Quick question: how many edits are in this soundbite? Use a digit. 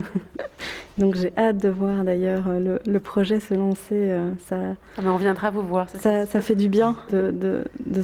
1